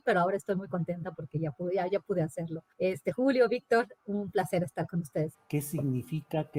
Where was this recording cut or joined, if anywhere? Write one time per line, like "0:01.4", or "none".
0:02.7
0:04.0
0:05.3